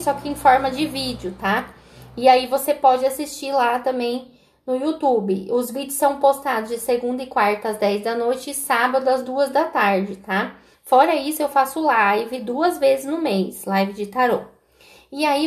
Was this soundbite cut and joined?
yes; 1 cut; at 10.7 s

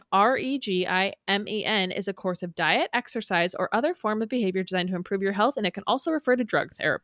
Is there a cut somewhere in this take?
no; 0 cuts

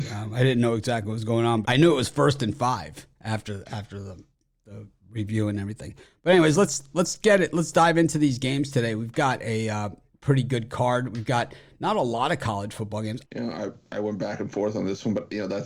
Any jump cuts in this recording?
yes; 2 cuts; at 1.6 s, 13.2 s

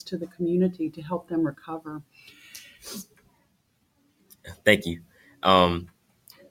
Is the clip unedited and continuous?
yes; 0 cuts

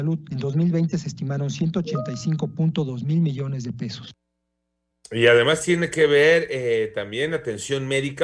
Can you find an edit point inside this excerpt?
yes; 1 cut; at 4.9 s

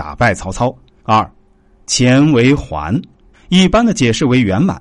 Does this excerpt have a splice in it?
yes; 2 cuts; at 1.0 s, 3.3 s

